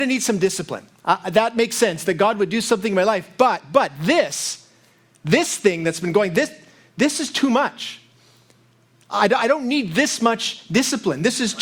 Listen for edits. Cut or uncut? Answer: uncut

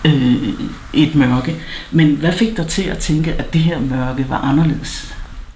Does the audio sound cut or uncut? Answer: uncut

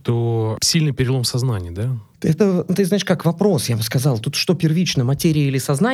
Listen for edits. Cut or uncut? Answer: uncut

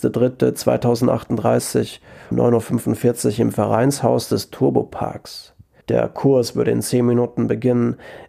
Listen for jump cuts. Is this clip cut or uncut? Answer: cut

